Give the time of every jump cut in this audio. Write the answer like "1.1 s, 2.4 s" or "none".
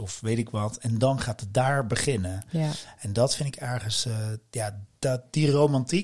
4.9 s